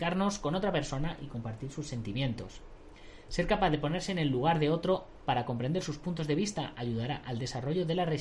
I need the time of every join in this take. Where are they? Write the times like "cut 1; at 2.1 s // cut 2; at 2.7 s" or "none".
none